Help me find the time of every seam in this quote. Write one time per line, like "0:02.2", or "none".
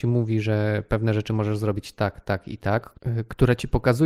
none

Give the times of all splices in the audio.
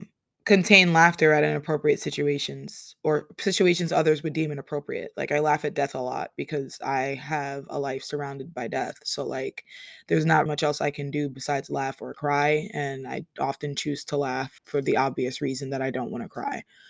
0:10.5
0:14.6

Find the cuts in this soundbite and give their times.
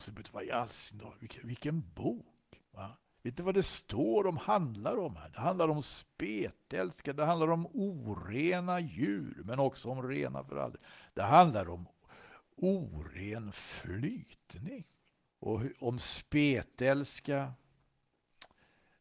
0:15.3

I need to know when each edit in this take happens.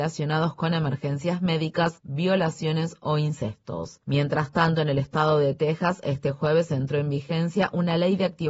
none

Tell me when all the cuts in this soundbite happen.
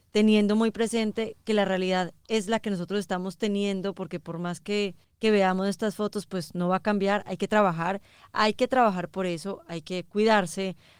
none

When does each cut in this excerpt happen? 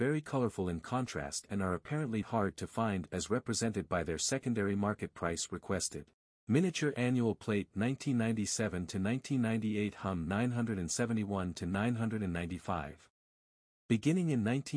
0:02.2
0:06.3

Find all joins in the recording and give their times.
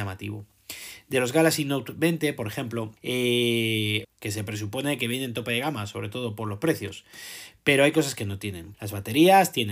0:03.0
0:04.0
0:08.7

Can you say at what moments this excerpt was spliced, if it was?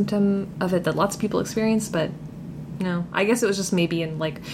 none

